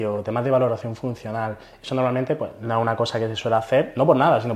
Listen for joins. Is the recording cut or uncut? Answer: uncut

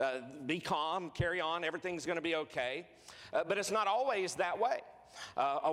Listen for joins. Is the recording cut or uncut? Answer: uncut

